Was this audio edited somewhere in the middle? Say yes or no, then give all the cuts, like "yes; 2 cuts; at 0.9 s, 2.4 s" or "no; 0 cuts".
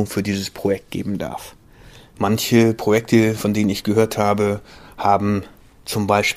yes; 1 cut; at 2.1 s